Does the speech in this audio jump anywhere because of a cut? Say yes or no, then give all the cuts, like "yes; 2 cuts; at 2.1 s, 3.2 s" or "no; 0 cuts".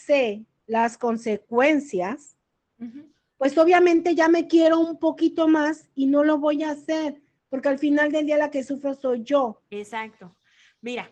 no; 0 cuts